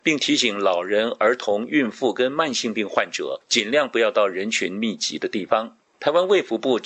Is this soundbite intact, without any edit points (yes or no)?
yes